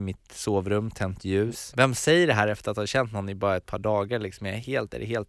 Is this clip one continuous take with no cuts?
no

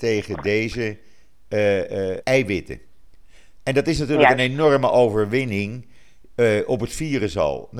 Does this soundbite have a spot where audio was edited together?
yes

